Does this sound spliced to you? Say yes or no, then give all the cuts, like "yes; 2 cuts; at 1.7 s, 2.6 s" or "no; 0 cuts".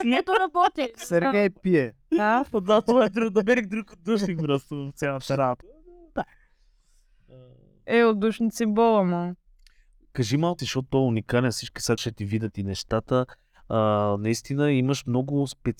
yes; 2 cuts; at 10.6 s, 12.0 s